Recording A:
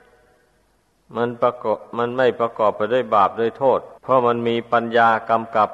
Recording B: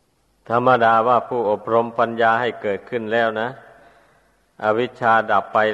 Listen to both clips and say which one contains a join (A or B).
A